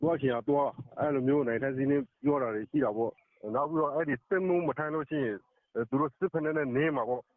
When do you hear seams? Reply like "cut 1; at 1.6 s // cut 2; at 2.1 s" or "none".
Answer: cut 1; at 2.1 s